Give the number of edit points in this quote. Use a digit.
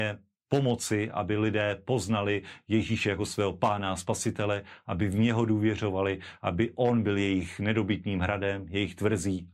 0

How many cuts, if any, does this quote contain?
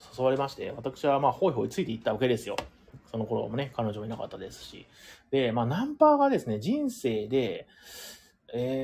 0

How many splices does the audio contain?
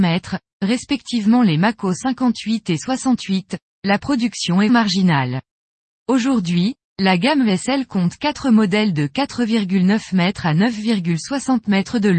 1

